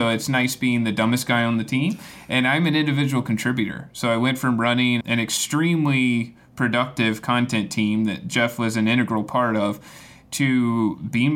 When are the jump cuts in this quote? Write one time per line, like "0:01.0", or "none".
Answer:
0:05.0